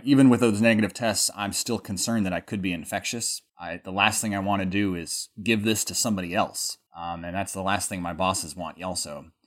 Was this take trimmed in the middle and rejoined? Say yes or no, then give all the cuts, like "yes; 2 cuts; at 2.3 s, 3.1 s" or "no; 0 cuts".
yes; 2 cuts; at 3.5 s, 6.9 s